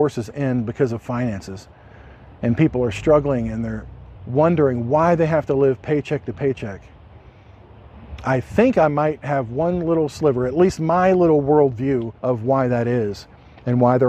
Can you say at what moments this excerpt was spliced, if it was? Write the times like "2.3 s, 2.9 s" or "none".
4.2 s, 12.2 s